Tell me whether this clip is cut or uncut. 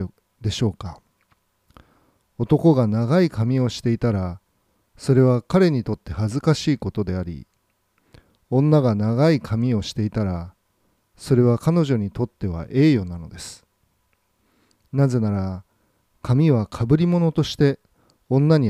uncut